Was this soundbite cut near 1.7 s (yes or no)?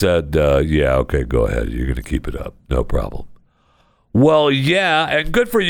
no